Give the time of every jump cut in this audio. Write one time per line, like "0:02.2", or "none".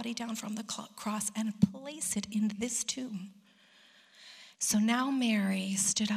0:04.6